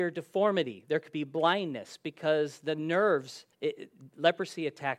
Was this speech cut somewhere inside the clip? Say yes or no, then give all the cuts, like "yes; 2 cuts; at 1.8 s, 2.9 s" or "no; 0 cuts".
yes; 1 cut; at 3.5 s